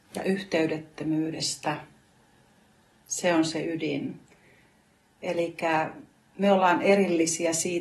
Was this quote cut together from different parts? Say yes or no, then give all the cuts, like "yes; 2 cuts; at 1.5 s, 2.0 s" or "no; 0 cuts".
no; 0 cuts